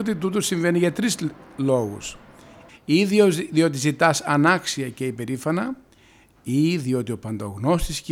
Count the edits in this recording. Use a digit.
1